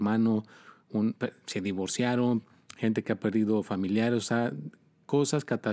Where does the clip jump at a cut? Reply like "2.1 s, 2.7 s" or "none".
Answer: none